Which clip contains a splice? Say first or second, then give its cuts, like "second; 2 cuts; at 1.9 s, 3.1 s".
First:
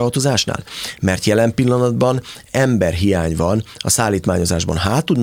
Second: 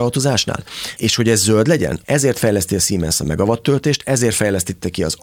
second; 2 cuts; at 1.0 s, 2.0 s